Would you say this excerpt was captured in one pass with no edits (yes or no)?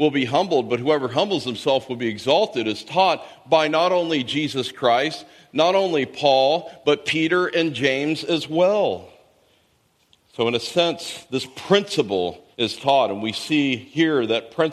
no